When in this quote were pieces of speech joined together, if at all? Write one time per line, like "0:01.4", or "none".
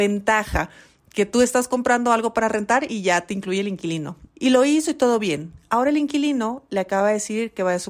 0:04.3